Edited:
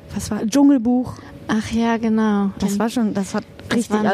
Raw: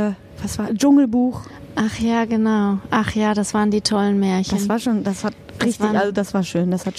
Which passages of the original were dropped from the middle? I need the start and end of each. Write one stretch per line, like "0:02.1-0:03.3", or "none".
0:02.9-0:04.5